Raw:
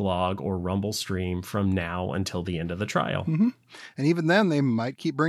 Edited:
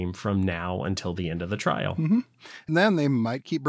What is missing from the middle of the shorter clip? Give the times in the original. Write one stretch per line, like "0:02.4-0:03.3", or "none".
0:04.0-0:04.2